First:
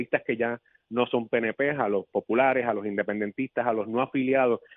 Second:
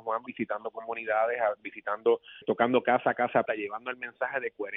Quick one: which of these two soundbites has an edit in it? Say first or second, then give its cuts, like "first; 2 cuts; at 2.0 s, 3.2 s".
second; 2 cuts; at 2.4 s, 3.5 s